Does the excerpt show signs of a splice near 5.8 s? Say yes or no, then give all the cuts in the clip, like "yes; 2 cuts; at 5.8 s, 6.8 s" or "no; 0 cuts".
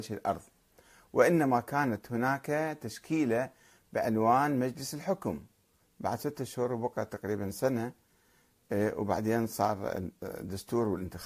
yes; 1 cut; at 5.8 s